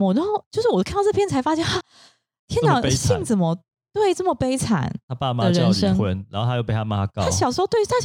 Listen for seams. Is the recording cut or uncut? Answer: uncut